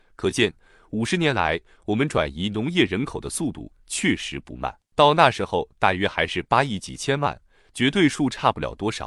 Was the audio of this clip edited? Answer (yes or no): yes